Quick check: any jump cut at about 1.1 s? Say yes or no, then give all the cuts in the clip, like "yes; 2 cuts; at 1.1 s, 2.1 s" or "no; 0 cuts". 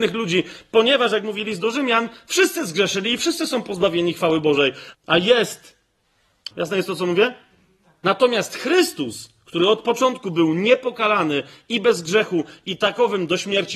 no; 2 cuts; at 4.9 s, 6.5 s